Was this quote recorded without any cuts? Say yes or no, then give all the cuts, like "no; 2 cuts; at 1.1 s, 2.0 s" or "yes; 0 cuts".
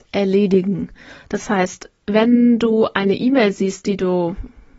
yes; 0 cuts